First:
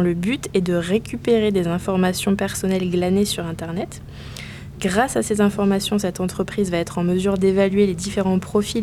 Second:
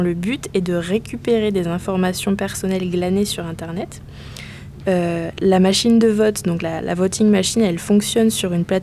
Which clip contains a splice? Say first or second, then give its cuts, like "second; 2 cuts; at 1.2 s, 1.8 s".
second; 1 cut; at 4.8 s